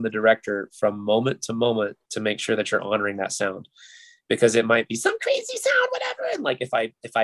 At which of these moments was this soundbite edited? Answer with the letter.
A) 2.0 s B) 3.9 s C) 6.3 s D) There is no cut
A